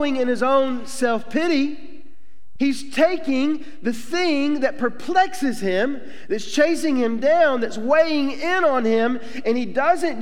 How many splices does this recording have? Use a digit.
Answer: 1